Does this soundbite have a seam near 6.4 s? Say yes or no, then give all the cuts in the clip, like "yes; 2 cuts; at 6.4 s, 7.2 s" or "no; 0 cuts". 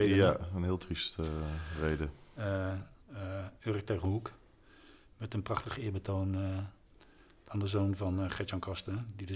no; 1 cut; at 2.9 s